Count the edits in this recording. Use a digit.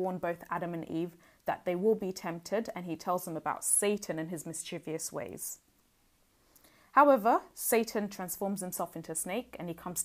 0